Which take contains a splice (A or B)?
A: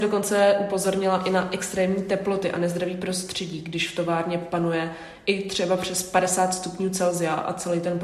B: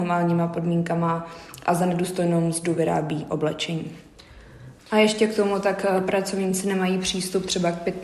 B